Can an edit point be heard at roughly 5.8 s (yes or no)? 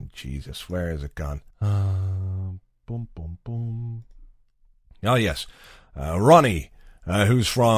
no